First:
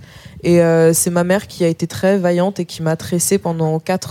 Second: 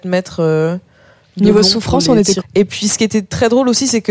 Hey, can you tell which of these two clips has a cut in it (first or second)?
second